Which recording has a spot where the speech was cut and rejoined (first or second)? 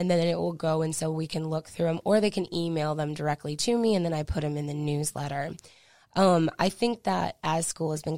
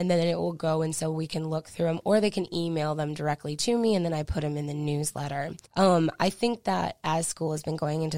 second